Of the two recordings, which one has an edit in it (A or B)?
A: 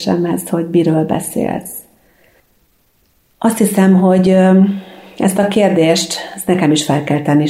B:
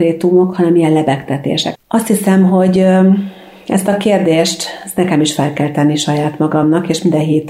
B